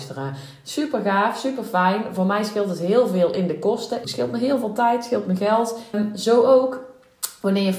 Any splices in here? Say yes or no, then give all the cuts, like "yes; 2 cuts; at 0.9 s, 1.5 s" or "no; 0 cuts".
yes; 2 cuts; at 4.0 s, 5.9 s